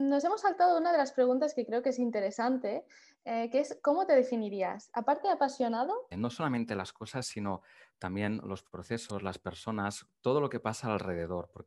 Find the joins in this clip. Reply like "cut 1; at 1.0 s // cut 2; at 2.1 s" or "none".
cut 1; at 6.1 s